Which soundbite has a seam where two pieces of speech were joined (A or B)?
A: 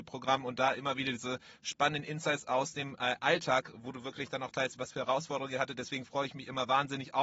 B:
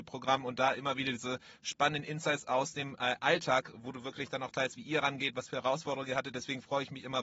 A